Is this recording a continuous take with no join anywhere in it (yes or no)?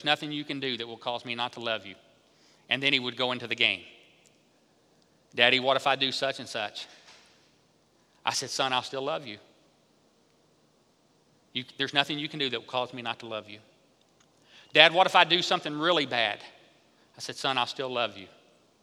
yes